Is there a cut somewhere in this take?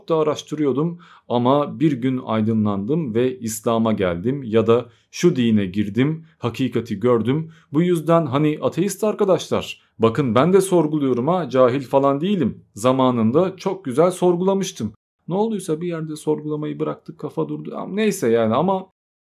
no; 0 cuts

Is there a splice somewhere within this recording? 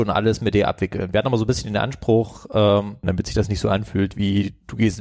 yes; 1 cut; at 3.0 s

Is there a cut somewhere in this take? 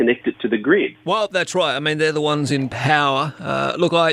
yes; 1 cut; at 1.0 s

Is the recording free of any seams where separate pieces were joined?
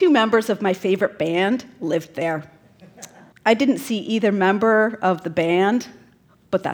no; 1 cut; at 3.3 s

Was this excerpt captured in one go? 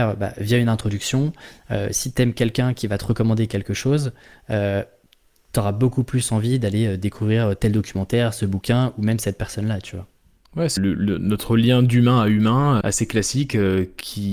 no; 2 cuts; at 10.8 s, 12.8 s

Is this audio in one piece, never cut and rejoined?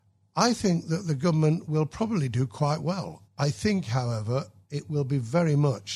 no; 1 cut; at 3.2 s

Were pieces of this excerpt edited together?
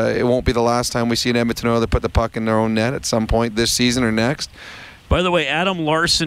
yes; 1 cut; at 5.1 s

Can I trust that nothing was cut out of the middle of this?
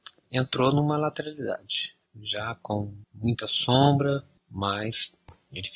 no; 1 cut; at 4.4 s

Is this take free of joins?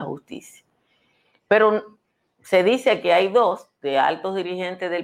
no; 1 cut; at 1.3 s

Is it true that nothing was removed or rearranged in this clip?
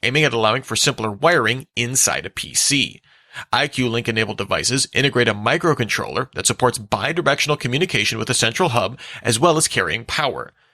yes; 0 cuts

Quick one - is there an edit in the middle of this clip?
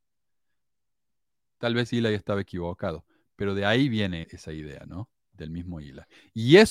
yes; 1 cut; at 4.2 s

